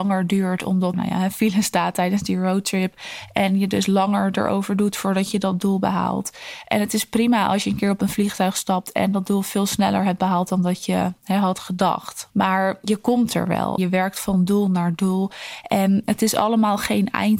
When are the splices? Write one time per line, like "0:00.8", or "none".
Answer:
0:00.9
0:12.3
0:13.8